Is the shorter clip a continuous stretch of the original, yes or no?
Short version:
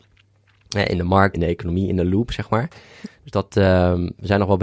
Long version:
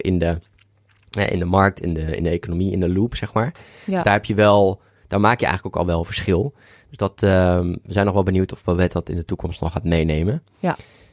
no